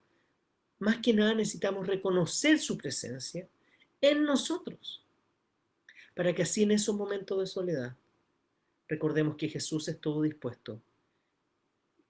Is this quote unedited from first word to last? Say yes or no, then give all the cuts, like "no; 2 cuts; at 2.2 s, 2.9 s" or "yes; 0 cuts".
yes; 0 cuts